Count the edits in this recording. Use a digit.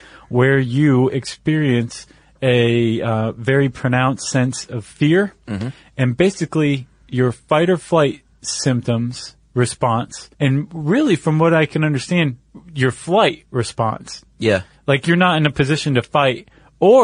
1